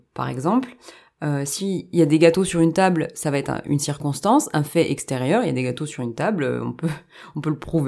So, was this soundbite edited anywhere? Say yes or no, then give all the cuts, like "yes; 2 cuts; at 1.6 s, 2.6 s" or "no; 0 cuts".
no; 0 cuts